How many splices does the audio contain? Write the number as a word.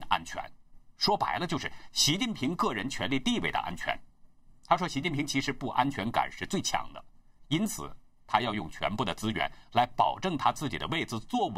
zero